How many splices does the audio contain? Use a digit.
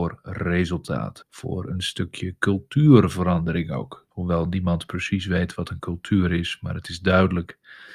2